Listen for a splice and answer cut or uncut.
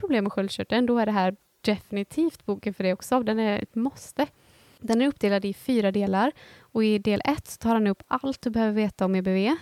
uncut